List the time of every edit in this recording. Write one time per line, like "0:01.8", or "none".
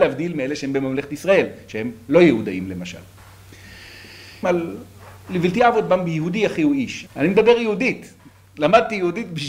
0:04.4
0:07.1